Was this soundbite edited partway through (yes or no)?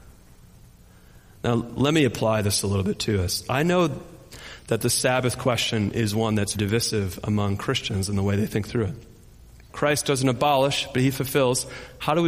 yes